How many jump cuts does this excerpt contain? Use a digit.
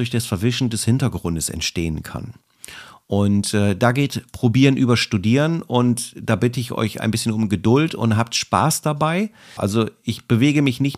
1